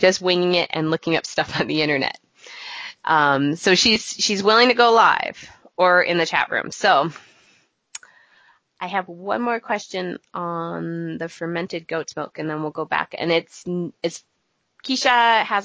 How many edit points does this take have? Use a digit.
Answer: 0